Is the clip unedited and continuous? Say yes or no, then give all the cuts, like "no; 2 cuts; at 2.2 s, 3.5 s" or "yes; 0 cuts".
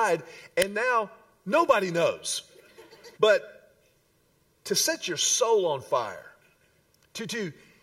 no; 1 cut; at 3.2 s